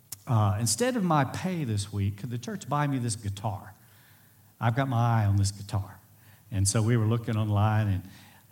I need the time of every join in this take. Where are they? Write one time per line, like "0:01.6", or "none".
none